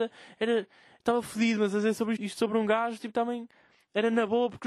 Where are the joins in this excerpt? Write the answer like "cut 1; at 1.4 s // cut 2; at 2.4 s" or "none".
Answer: cut 1; at 2.2 s